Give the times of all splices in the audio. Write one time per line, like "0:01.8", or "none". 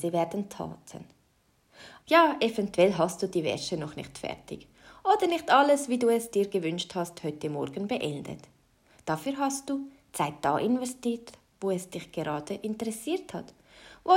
0:02.0